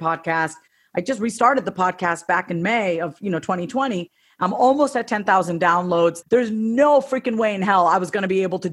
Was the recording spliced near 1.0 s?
no; 1 cut; at 6.2 s

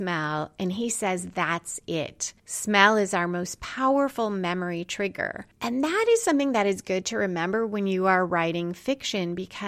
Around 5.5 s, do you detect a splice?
no; 0 cuts

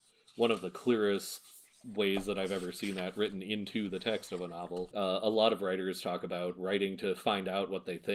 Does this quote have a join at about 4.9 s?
yes; 1 cut; at 4.9 s

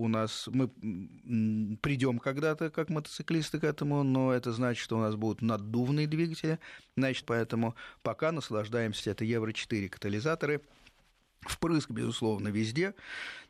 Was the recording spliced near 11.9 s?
no; 2 cuts; at 7.2 s, 9.0 s

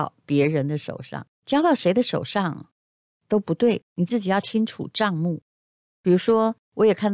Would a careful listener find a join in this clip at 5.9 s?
no; 1 cut; at 1.3 s

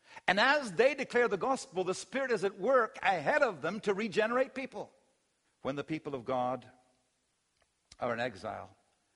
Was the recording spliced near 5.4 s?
yes; 1 cut; at 5.4 s

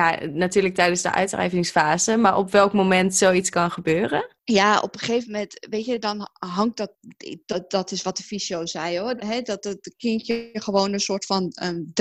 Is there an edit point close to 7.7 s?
no; 1 cut; at 9.2 s

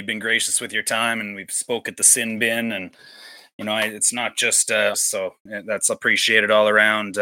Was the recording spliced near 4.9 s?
yes; 1 cut; at 4.9 s

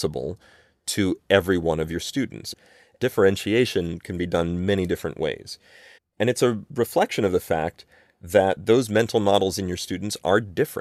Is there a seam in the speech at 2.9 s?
no; 1 cut; at 6.0 s

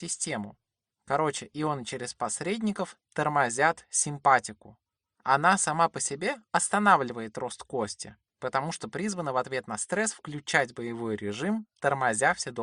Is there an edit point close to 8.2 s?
no; 0 cuts

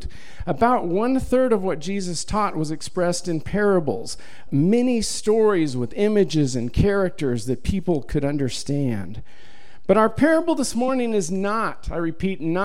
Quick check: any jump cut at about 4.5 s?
yes; 1 cut; at 4.5 s

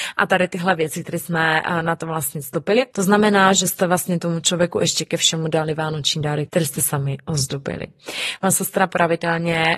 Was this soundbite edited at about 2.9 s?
yes; 3 cuts; at 2.9 s, 6.5 s, 8.4 s

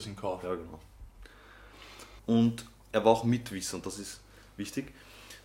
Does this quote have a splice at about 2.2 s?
yes; 1 cut; at 2.2 s

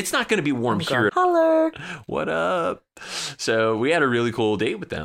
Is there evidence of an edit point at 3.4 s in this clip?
no; 1 cut; at 1.1 s

